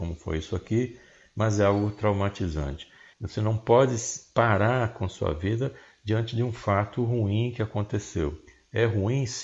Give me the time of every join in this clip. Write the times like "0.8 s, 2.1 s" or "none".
3.1 s

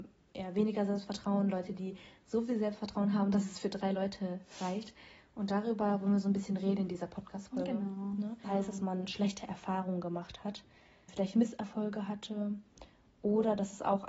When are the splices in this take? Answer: 8.4 s, 11.1 s

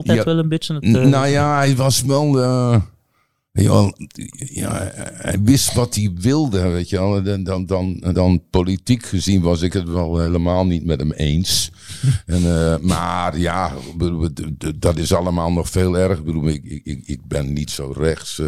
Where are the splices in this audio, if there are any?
8.1 s

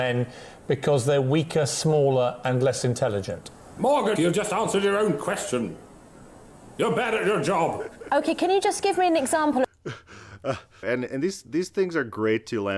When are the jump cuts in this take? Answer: 4.2 s, 6.7 s, 10.8 s

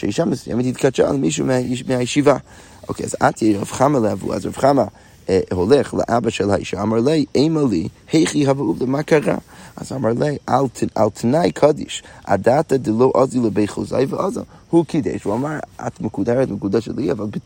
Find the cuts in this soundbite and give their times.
none

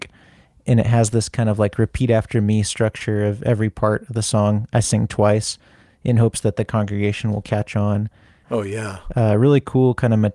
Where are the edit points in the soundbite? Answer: 8.4 s

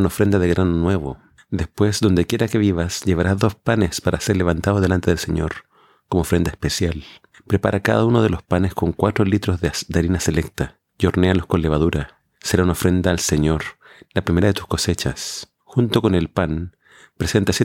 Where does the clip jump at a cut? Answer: none

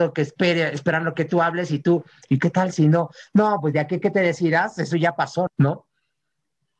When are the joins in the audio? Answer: 5.5 s

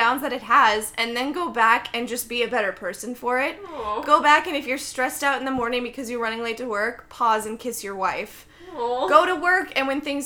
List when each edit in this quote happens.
none

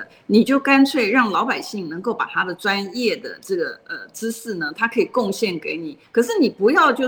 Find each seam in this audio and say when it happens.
6.0 s

